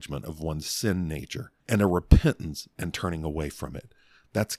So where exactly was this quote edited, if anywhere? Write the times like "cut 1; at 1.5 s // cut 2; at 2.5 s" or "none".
cut 1; at 1.6 s